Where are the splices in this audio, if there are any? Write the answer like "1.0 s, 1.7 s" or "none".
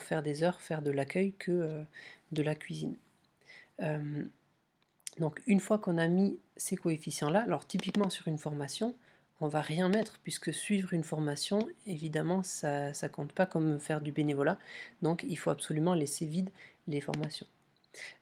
none